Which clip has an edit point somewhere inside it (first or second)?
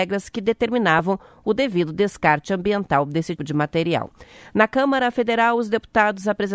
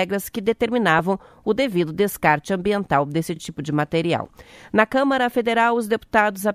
first